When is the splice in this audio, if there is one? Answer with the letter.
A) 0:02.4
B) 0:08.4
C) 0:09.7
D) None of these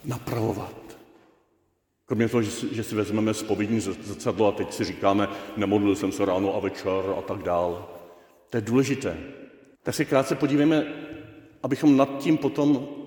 C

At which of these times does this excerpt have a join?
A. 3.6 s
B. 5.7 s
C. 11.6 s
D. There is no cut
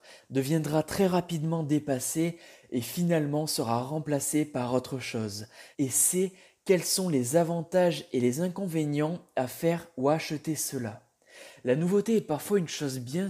B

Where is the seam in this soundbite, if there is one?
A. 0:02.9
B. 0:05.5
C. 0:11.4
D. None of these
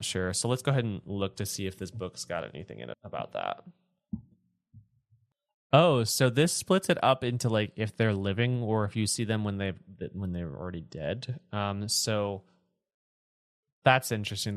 A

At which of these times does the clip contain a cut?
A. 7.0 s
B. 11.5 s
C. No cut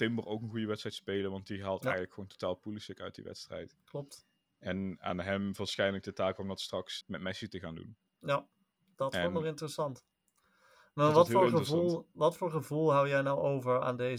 A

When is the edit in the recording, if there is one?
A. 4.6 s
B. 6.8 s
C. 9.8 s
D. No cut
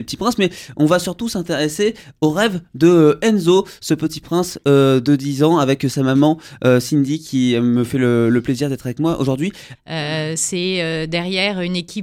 C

